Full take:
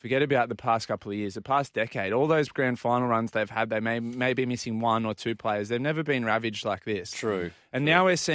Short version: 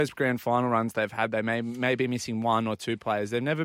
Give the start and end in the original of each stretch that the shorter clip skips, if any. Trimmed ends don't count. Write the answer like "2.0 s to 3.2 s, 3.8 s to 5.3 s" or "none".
none